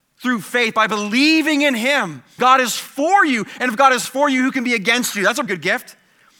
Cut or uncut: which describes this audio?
cut